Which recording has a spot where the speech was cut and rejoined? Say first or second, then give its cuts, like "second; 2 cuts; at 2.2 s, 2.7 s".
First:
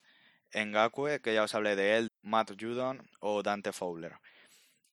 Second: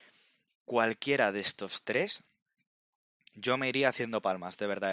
first; 1 cut; at 2.1 s